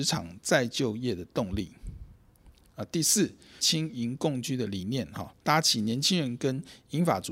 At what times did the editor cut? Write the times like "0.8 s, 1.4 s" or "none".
3.6 s